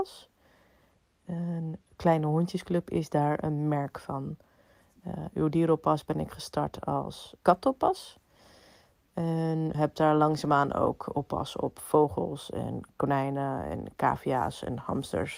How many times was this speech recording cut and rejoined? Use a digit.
2